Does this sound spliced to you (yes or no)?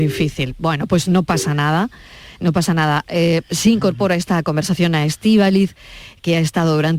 no